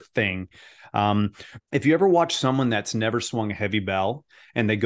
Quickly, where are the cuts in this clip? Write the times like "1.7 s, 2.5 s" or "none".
1.6 s